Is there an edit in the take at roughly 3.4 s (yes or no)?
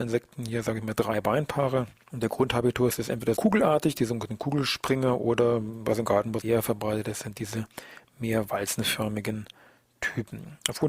yes